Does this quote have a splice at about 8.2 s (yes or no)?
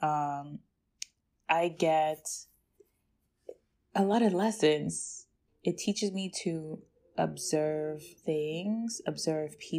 yes